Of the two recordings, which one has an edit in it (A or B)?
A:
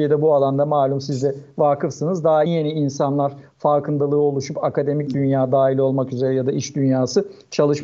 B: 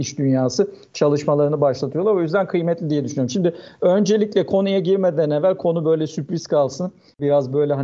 A